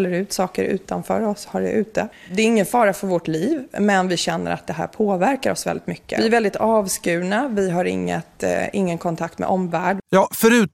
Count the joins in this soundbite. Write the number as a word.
one